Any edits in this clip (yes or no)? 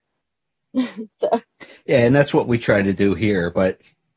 no